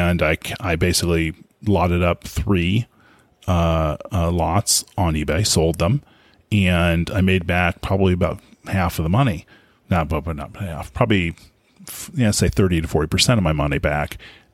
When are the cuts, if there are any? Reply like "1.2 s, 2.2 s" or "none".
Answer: none